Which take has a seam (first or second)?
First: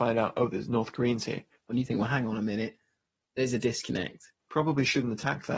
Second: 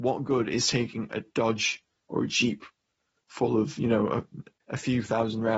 first